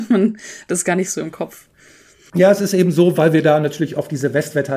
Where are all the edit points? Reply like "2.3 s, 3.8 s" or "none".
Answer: none